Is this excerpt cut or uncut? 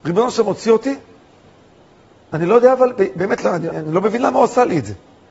cut